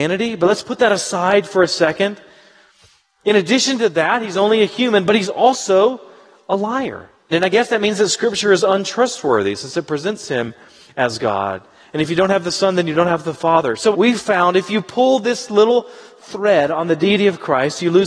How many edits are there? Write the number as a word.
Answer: two